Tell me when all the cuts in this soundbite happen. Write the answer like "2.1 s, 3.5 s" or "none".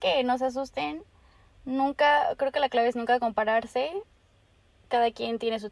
none

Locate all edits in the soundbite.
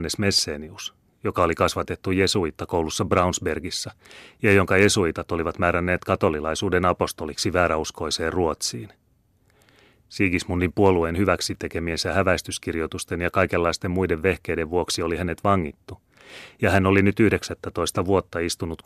none

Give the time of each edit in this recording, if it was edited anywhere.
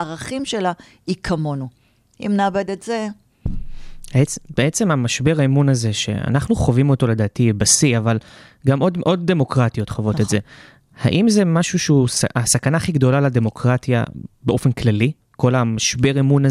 none

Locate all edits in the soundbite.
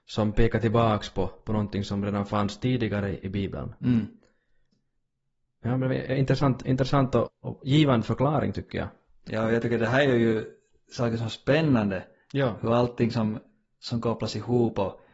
7.3 s

